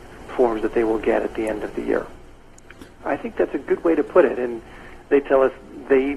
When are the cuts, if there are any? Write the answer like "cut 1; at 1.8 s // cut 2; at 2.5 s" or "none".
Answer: cut 1; at 3.0 s // cut 2; at 5.0 s

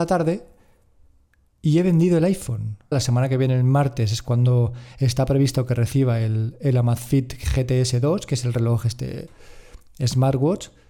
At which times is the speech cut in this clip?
cut 1; at 2.9 s

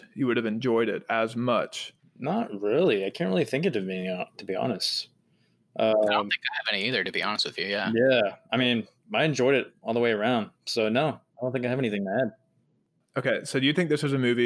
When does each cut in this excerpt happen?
cut 1; at 2.0 s

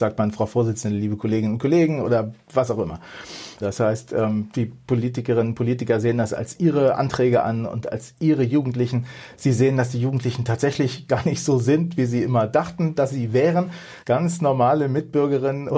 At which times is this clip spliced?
cut 1; at 3.6 s // cut 2; at 14.0 s

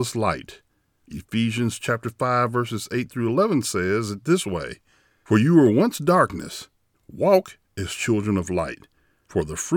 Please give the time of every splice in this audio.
cut 1; at 6.9 s

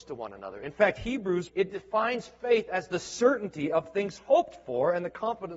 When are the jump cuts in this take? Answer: cut 1; at 1.5 s

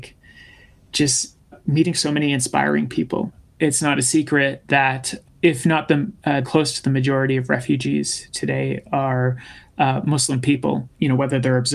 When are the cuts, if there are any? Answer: cut 1; at 6.4 s

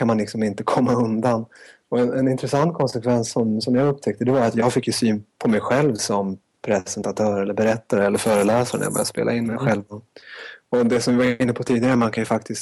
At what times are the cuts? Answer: none

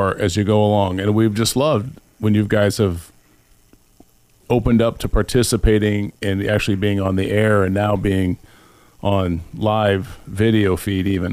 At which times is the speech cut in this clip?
none

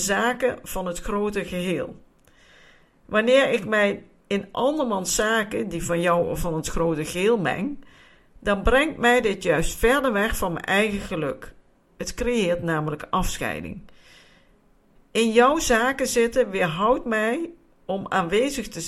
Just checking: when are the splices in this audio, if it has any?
none

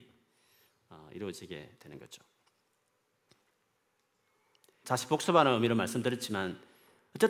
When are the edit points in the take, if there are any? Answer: cut 1; at 4.8 s

